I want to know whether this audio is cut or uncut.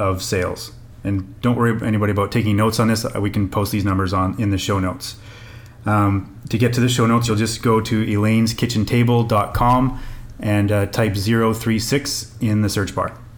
uncut